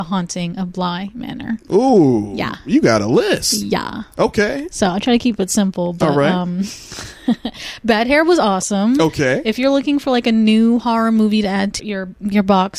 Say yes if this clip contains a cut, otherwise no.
yes